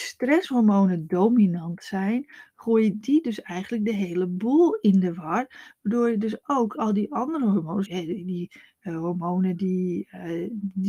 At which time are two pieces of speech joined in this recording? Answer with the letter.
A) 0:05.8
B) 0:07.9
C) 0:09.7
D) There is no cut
B